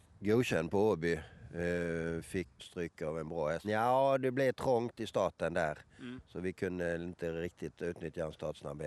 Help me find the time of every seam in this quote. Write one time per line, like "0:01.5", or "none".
0:02.6
0:03.6

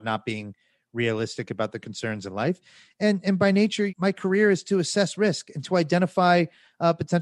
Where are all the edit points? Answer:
0:03.9

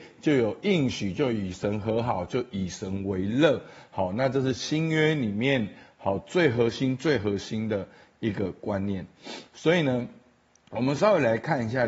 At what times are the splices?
none

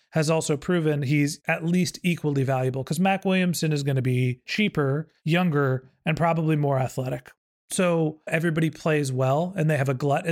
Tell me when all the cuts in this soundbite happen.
0:08.3

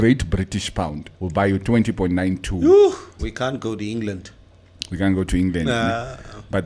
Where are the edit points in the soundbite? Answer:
0:01.1
0:03.2

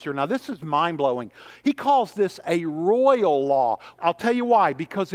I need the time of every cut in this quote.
0:03.9

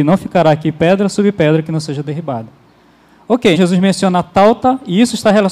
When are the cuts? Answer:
0:03.5

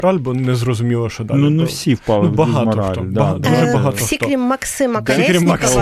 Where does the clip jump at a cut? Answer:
none

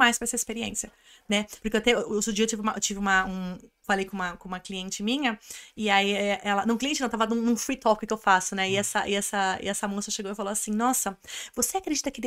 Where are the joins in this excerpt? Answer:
none

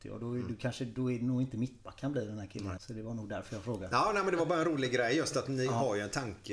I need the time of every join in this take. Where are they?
0:02.8

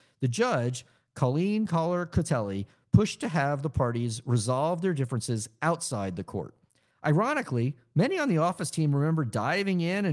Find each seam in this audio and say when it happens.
0:06.9

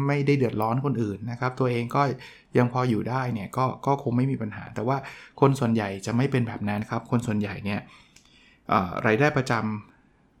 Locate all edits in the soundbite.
0:06.8

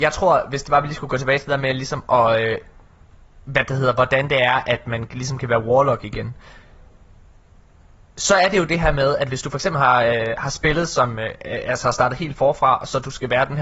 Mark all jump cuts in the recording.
none

